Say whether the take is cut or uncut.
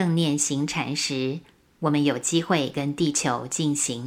uncut